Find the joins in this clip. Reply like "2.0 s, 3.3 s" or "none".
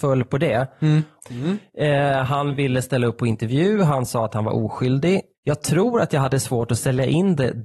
1.2 s, 5.3 s